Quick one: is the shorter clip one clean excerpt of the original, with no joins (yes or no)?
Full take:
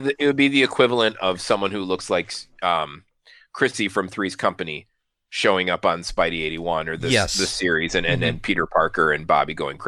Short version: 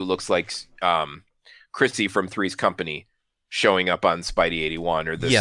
yes